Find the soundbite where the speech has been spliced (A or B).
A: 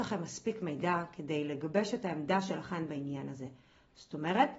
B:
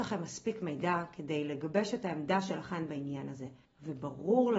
B